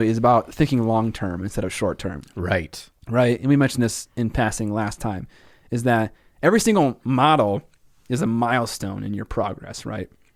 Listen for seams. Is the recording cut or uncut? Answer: uncut